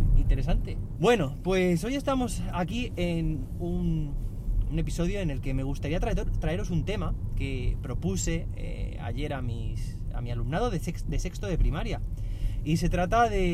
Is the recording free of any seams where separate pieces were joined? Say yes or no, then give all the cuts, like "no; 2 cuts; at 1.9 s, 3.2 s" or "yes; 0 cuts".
no; 1 cut; at 1.0 s